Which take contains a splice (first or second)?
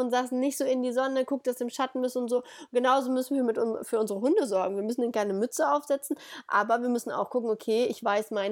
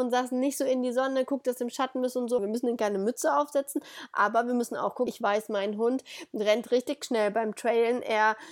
second